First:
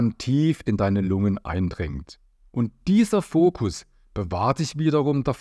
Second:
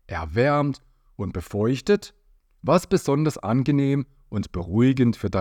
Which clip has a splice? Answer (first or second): first